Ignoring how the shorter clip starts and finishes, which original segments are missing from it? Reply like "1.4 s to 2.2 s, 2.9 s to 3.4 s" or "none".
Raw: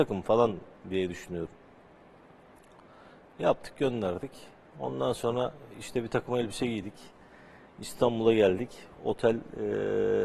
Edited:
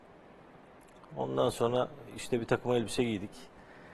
2.8 s to 4.7 s

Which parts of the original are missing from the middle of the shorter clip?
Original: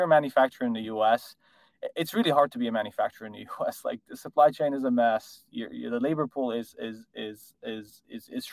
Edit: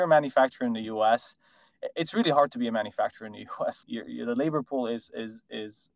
3.8 s to 5.5 s

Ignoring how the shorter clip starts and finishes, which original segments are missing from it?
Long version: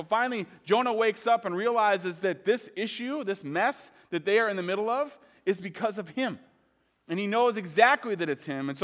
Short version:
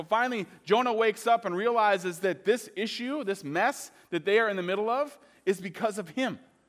none

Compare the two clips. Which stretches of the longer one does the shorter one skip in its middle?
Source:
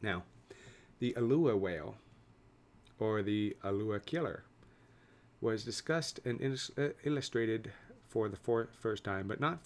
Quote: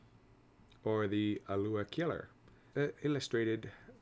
4.9 s to 6.7 s

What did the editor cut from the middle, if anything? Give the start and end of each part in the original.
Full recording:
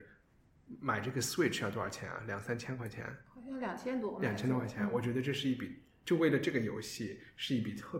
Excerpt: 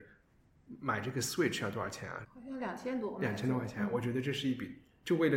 2.2 s to 3.2 s

